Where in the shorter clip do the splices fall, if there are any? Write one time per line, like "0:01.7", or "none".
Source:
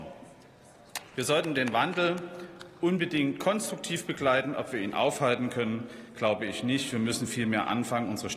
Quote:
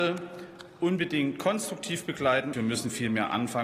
0:02.5